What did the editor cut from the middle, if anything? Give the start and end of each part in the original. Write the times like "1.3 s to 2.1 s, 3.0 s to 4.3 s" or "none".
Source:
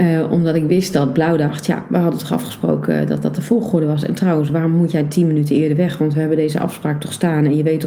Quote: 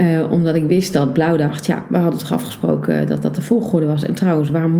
none